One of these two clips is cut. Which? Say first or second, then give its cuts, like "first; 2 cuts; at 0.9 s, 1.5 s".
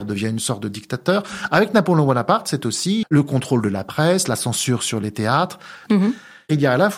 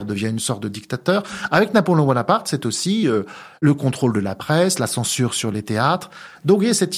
first; 2 cuts; at 3.0 s, 5.9 s